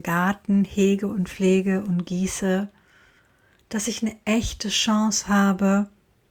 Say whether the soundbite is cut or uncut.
uncut